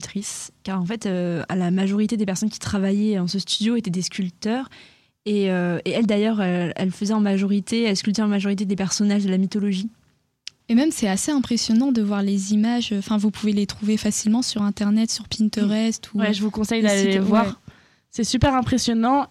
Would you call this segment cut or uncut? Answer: uncut